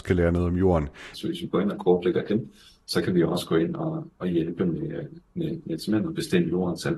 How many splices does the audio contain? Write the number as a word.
one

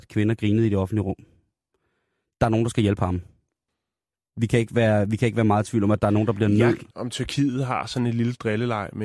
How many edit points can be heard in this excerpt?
one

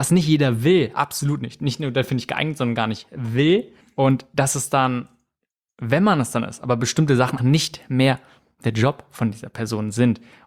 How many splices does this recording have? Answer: two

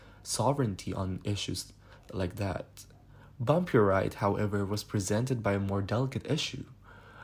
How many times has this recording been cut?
zero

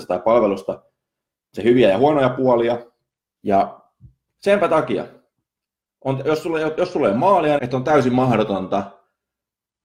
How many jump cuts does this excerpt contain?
two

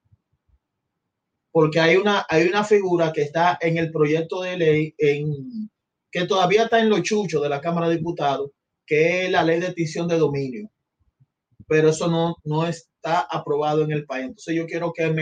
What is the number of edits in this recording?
zero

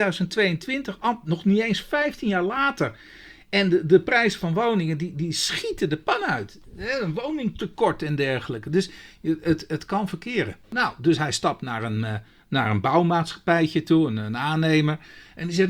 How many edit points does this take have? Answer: zero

